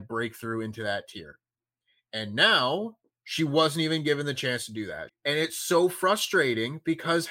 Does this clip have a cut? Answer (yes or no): yes